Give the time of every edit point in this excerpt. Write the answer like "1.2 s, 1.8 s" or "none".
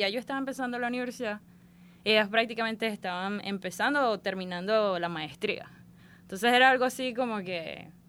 none